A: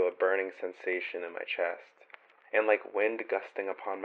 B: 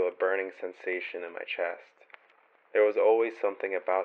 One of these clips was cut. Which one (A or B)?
A